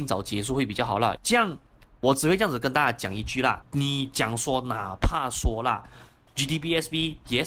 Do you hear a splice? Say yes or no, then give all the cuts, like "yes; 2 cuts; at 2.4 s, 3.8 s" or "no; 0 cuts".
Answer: yes; 2 cuts; at 1.2 s, 3.6 s